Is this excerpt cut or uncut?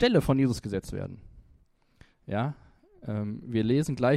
uncut